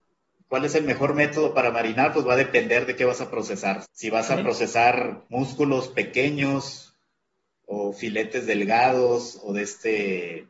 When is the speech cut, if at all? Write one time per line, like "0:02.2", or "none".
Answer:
0:03.8
0:05.3